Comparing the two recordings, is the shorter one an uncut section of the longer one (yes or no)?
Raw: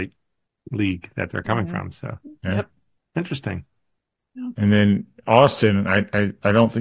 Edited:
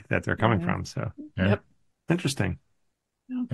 yes